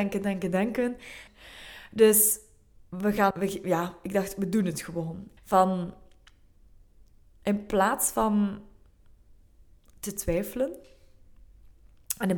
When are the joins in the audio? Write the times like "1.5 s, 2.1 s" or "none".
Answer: 1.3 s, 3.3 s, 5.4 s